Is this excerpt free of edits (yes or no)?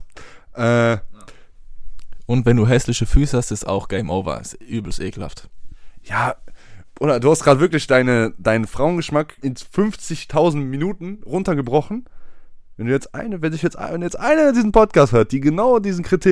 no